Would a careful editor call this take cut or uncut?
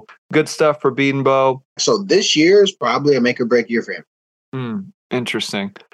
cut